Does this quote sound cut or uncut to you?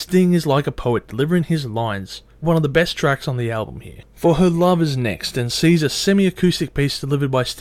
cut